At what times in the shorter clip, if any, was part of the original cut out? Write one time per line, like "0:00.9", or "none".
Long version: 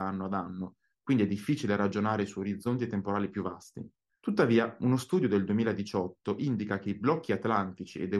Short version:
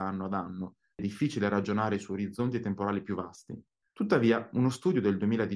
0:01.0